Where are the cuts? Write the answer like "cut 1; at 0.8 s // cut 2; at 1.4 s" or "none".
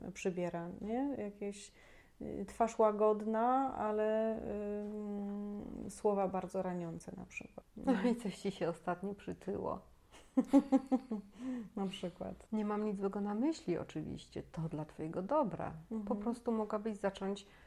none